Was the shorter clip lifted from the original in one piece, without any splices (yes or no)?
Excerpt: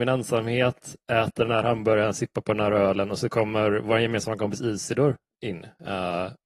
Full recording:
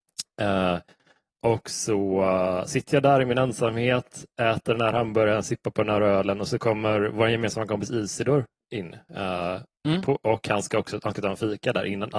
yes